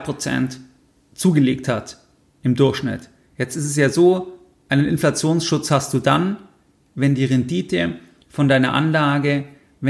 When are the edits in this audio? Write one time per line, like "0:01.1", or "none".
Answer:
0:03.3